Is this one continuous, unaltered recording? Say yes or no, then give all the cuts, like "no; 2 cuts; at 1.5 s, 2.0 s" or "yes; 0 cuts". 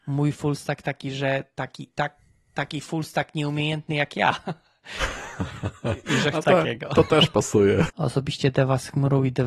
no; 2 cuts; at 6.4 s, 7.9 s